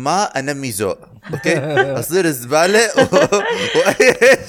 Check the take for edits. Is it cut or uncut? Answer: uncut